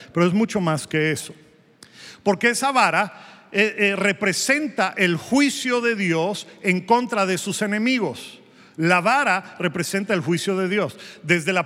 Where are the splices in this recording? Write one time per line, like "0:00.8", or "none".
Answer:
none